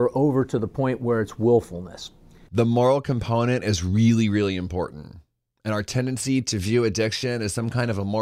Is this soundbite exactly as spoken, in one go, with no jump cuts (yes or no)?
no